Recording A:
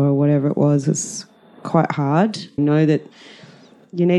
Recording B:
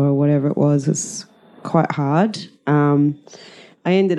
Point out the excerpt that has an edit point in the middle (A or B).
A